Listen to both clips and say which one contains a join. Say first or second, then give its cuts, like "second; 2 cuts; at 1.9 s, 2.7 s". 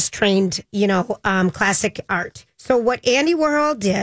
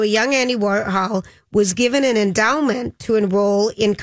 first; 1 cut; at 2.5 s